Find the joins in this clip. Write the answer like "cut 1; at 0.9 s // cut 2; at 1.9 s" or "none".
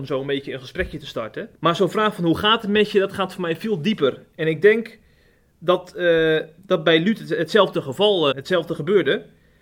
cut 1; at 1.5 s // cut 2; at 8.3 s